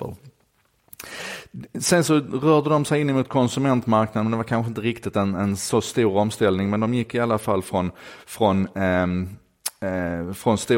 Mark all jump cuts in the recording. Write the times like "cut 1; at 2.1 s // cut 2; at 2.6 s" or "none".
none